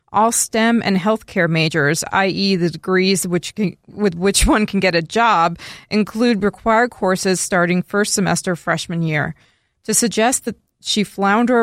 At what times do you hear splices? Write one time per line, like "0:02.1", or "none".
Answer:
none